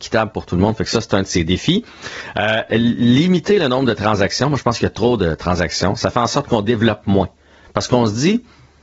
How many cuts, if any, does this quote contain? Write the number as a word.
zero